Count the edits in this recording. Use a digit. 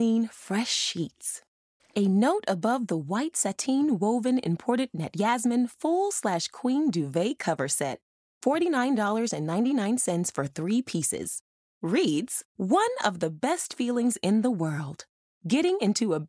2